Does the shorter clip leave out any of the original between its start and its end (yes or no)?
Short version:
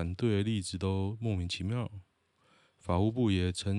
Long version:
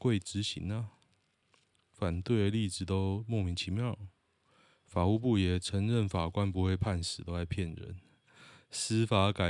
no